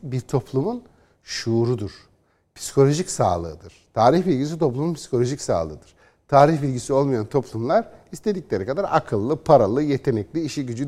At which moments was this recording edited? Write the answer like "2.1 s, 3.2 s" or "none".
none